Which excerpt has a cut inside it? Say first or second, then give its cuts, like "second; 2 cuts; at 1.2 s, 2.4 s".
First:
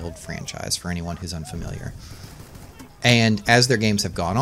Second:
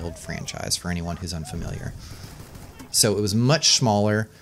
second; 1 cut; at 2.9 s